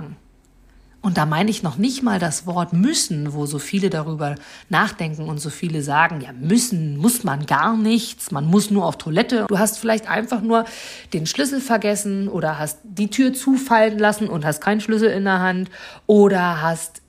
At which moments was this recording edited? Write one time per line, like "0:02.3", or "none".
0:09.5